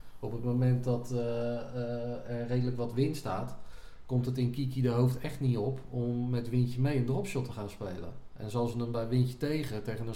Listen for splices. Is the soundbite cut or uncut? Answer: uncut